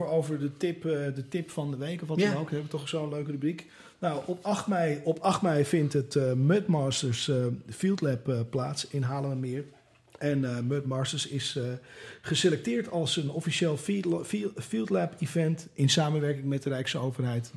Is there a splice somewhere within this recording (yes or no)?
no